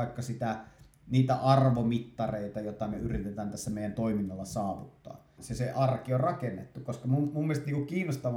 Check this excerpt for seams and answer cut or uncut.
cut